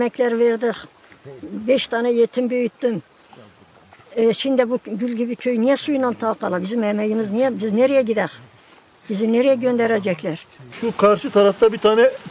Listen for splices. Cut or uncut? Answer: uncut